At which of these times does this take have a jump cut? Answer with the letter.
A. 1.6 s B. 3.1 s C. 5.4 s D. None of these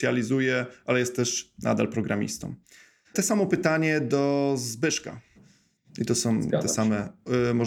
C